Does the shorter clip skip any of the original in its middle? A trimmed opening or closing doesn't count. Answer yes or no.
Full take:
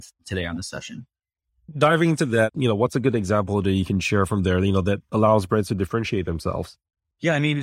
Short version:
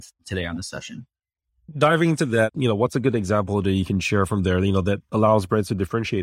no